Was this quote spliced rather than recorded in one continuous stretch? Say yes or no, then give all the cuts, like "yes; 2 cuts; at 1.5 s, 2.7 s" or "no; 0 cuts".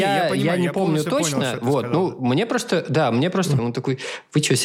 yes; 1 cut; at 3.6 s